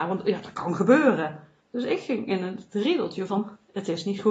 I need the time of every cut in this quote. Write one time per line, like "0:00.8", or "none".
0:01.6